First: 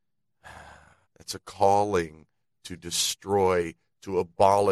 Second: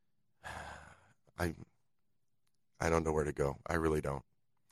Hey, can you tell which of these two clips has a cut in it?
first; 1 cut; at 1.0 s

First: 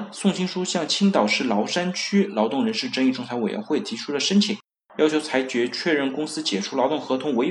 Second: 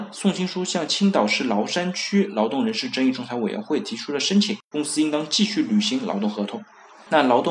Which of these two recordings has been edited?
second; 1 cut; at 4.7 s

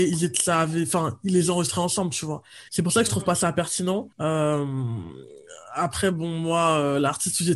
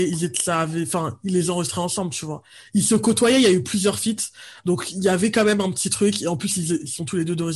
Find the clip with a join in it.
first; 2 cuts; at 2.7 s, 4.1 s

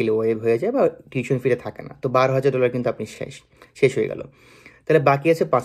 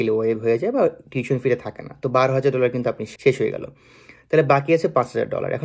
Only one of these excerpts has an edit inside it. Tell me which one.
second; 1 cut; at 3.2 s

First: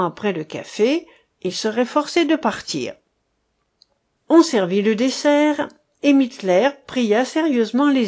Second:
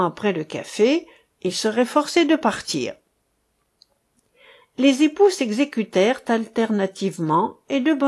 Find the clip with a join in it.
first; 1 cut; at 4.2 s

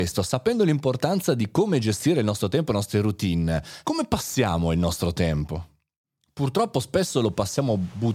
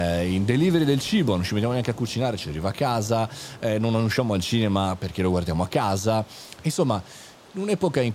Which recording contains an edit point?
first; 1 cut; at 3.8 s

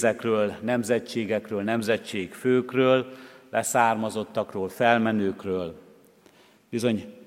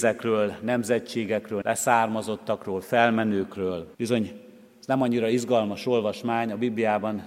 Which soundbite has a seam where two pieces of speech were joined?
second; 2 cuts; at 1.6 s, 3.9 s

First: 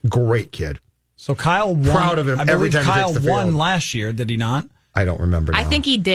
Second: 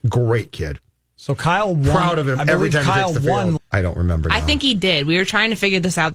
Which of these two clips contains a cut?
second; 1 cut; at 3.6 s

